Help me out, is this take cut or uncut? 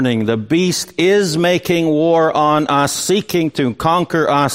uncut